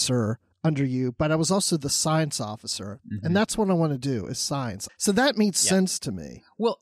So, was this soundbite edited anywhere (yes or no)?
yes